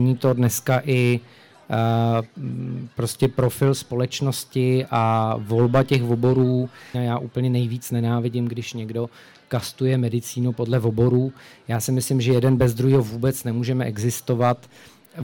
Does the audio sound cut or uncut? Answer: cut